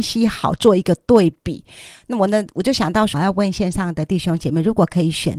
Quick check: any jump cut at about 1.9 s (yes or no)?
no